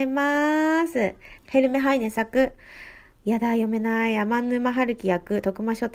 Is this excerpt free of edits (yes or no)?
no